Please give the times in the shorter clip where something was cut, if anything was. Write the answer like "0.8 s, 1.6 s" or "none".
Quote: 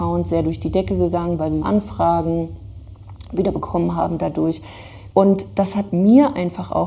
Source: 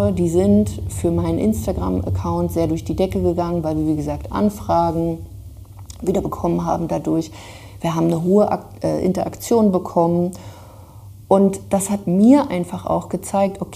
1.6 s, 5.1 s